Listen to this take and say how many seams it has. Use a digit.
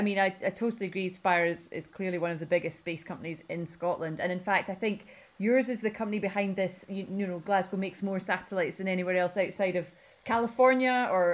0